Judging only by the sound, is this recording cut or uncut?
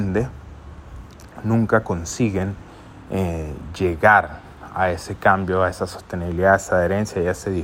uncut